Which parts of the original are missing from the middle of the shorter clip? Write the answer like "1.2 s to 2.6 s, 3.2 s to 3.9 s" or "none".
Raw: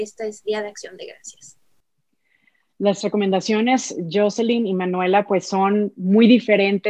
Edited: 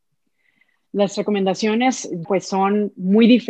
4.1 s to 5.2 s

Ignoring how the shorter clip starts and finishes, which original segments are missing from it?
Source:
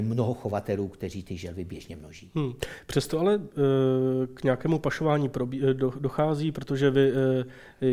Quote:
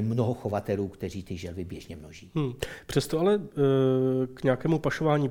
none

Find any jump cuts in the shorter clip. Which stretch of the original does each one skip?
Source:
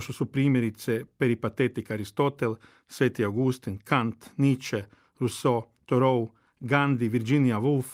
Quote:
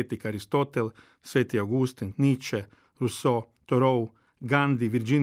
3.8 s to 4.3 s

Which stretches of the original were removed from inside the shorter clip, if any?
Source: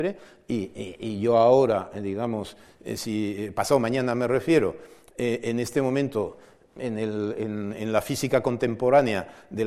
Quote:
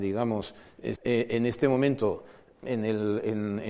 3.0 s to 5.1 s

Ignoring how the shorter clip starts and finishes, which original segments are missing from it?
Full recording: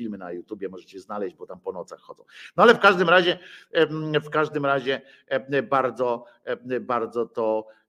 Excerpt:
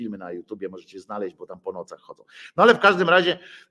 none

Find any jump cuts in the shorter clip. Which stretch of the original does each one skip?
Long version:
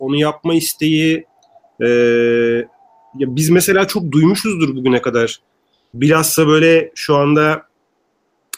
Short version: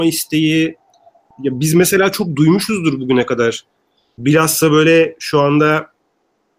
1.8 s to 3.1 s

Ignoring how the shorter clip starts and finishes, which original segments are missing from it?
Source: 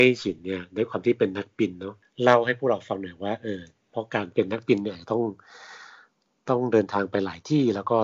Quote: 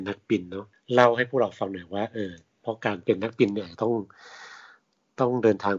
none

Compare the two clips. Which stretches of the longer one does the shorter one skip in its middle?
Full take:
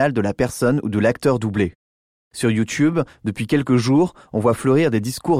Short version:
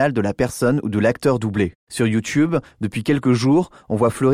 1.8 s to 2.2 s

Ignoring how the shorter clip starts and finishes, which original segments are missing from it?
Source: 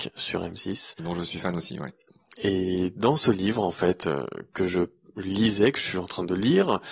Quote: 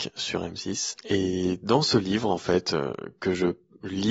0.9 s to 2.3 s

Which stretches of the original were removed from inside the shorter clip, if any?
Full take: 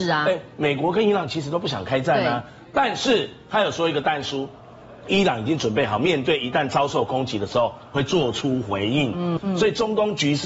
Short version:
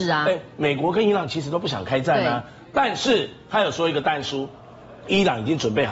none

